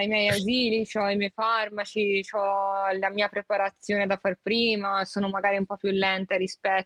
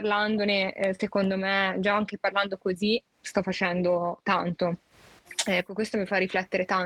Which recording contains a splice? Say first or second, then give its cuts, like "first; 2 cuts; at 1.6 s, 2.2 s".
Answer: second; 1 cut; at 5.7 s